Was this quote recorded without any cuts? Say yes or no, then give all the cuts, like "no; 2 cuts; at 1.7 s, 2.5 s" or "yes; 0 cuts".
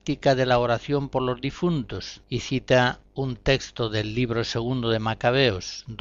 no; 1 cut; at 2.2 s